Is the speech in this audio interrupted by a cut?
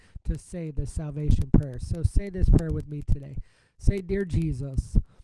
no; 0 cuts

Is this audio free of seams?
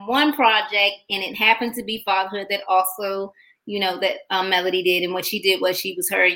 yes; 0 cuts

